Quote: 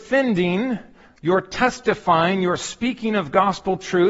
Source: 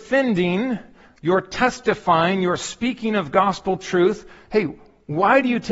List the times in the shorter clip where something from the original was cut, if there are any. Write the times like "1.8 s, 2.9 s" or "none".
none